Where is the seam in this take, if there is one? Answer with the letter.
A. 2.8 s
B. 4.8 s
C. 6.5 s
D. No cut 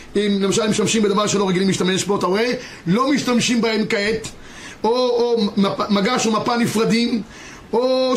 D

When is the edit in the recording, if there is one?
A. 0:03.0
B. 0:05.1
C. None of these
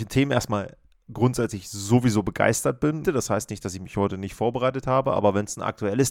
A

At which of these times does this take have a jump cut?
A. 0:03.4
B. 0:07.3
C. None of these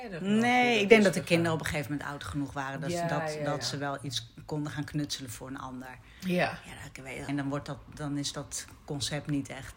B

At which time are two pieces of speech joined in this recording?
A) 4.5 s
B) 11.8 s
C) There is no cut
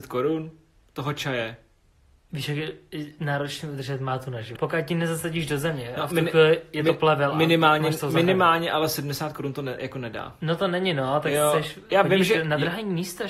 A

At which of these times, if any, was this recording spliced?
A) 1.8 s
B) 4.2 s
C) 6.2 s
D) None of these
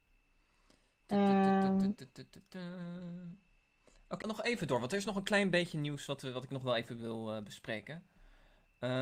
B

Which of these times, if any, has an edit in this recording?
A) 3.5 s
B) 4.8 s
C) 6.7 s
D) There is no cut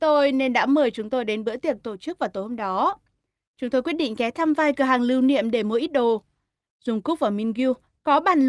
C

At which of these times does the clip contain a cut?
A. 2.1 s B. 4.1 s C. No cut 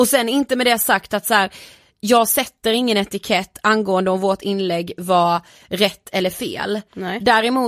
C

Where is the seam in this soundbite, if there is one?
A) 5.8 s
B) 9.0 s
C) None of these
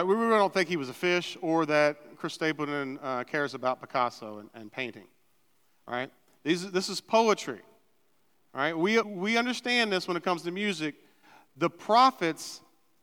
B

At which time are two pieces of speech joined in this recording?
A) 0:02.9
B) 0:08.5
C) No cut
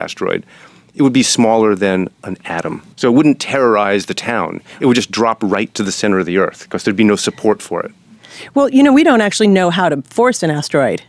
A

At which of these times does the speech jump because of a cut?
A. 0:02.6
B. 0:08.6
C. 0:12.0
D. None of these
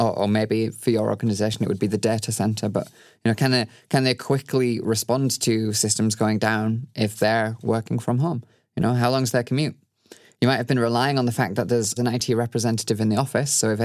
C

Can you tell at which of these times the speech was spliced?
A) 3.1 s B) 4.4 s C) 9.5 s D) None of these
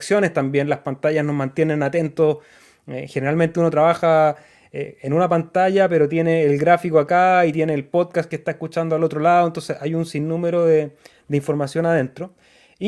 D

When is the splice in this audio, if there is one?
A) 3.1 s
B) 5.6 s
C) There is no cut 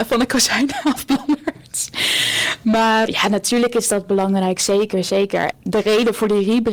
A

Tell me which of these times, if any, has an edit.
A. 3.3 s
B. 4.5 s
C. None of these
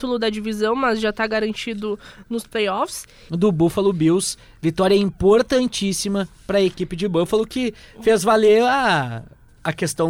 A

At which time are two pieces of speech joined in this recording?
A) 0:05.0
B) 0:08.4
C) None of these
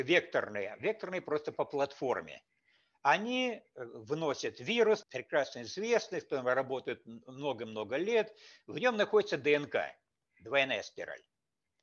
A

